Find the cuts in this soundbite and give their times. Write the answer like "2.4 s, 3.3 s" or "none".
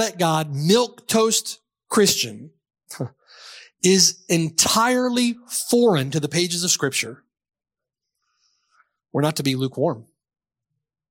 none